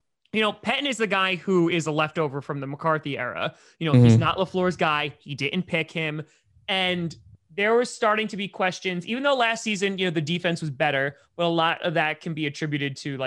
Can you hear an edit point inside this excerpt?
no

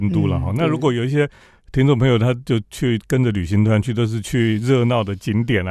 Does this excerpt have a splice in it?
no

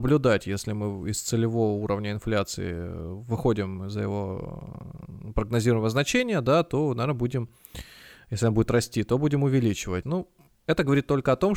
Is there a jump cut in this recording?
yes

